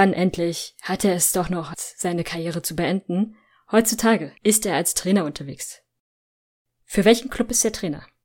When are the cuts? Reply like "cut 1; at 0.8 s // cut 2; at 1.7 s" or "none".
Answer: cut 1; at 1.7 s // cut 2; at 4.4 s